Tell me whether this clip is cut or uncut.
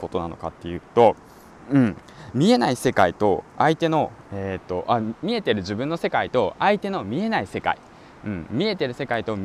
uncut